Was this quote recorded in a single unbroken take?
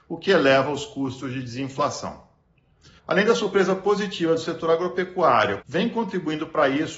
no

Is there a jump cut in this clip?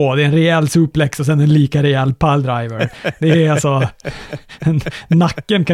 no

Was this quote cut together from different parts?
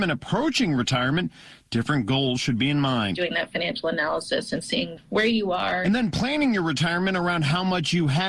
no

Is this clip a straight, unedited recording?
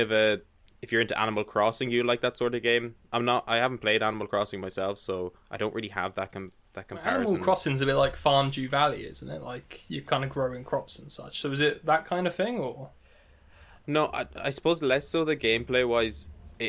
yes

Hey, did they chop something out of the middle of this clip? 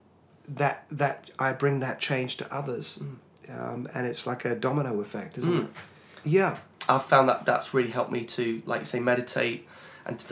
yes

